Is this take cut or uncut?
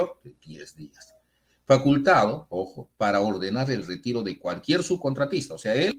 uncut